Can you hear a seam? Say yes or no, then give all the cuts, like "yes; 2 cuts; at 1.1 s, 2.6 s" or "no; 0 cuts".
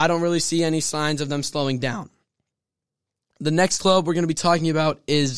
no; 0 cuts